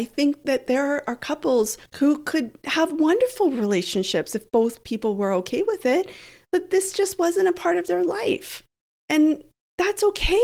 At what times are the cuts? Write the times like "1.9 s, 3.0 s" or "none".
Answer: 1.9 s